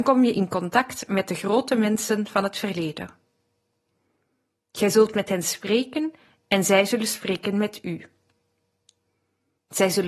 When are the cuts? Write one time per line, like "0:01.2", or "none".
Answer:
none